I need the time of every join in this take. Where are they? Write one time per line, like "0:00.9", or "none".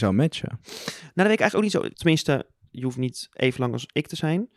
0:01.9